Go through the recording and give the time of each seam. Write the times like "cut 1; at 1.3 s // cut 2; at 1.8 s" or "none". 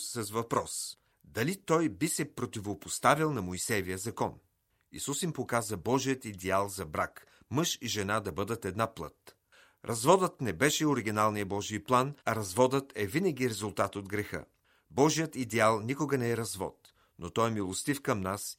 cut 1; at 12.2 s